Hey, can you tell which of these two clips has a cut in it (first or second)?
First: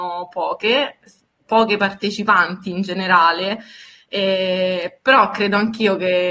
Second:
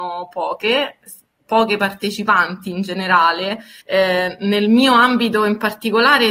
second